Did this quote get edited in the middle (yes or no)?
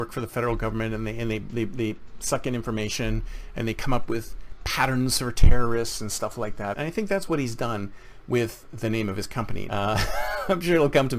yes